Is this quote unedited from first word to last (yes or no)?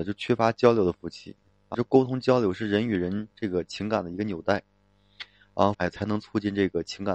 no